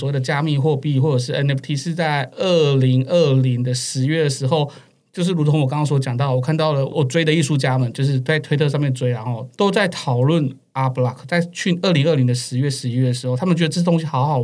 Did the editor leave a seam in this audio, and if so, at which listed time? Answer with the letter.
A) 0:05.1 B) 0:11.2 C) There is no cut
C